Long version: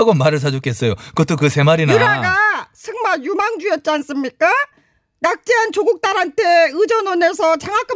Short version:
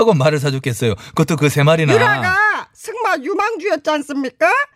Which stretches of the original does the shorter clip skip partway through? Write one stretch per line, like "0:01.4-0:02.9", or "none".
none